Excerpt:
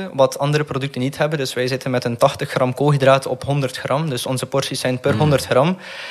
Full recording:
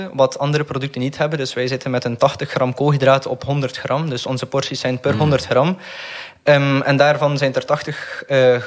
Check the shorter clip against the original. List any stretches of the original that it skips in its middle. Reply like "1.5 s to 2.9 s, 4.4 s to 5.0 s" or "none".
none